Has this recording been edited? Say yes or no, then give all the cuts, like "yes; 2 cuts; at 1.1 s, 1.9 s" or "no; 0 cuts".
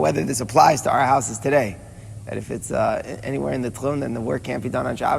yes; 1 cut; at 2.2 s